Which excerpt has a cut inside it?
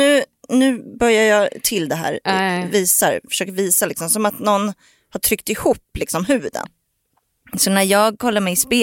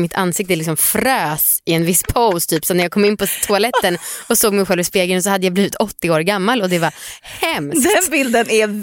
first; 1 cut; at 6.6 s

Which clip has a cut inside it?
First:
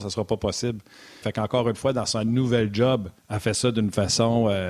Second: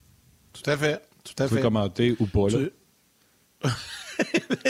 first; 2 cuts; at 1.2 s, 3.2 s

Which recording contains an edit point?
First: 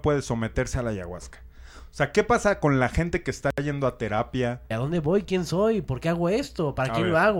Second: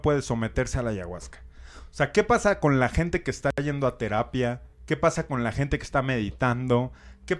first; 1 cut; at 4.7 s

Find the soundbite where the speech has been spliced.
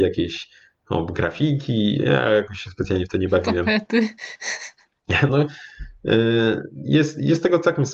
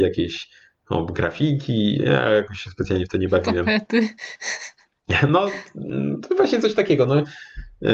first; 1 cut; at 5.3 s

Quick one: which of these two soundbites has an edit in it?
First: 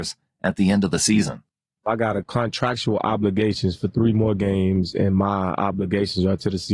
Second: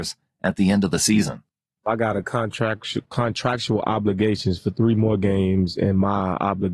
first; 1 cut; at 2.2 s

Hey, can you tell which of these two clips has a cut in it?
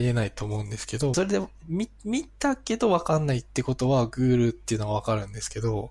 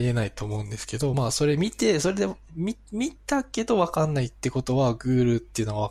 first; 1 cut; at 1.1 s

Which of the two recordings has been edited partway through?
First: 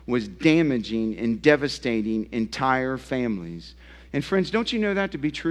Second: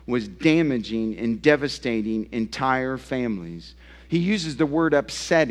first; 1 cut; at 4.1 s

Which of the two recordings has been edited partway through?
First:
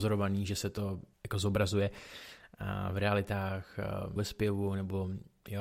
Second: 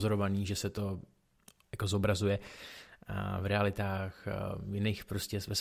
first; 2 cuts; at 1.1 s, 4.2 s

